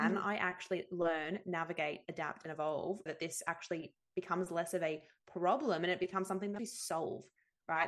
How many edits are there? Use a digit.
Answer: 2